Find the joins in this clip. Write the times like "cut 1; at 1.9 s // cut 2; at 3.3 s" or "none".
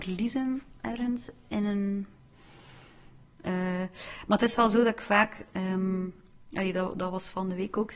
cut 1; at 3.3 s